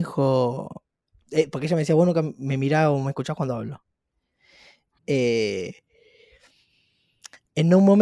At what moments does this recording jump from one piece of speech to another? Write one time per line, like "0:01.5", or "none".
0:05.0